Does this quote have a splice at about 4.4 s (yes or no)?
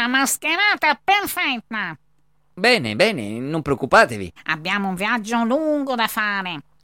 yes